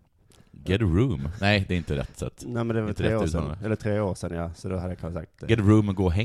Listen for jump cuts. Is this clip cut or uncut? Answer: uncut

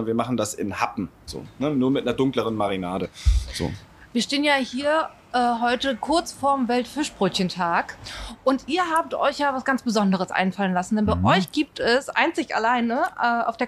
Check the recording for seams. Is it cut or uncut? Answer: cut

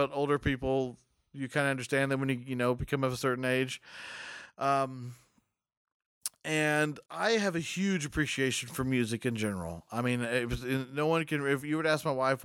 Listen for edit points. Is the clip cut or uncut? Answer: cut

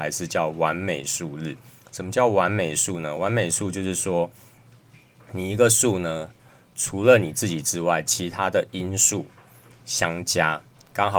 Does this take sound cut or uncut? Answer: uncut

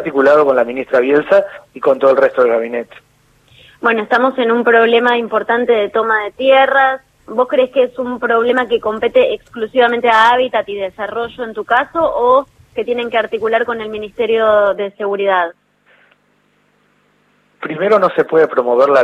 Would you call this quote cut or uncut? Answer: cut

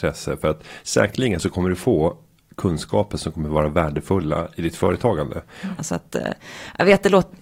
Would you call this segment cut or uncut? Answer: cut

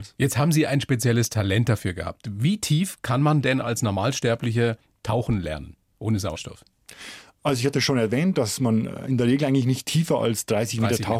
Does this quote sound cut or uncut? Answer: uncut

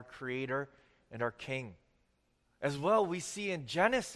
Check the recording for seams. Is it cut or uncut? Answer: cut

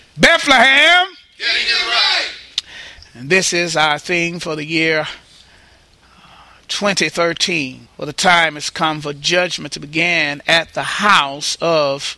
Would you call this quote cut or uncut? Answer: cut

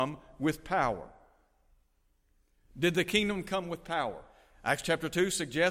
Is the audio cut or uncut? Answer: uncut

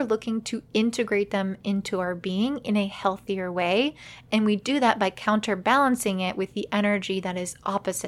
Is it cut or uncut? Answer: uncut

